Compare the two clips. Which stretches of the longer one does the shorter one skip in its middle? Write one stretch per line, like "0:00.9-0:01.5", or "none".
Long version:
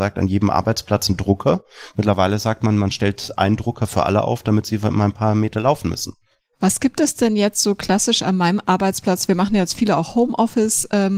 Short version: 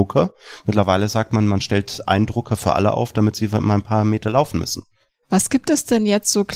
none